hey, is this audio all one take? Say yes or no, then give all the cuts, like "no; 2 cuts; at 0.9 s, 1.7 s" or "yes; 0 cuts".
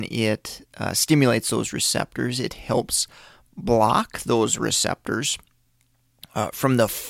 yes; 0 cuts